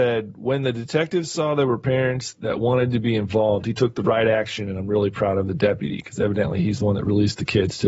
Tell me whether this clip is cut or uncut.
uncut